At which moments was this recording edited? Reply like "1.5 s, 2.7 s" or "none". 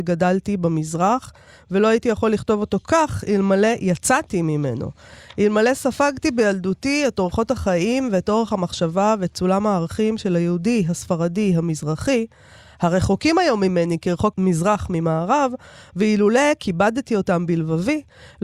14.3 s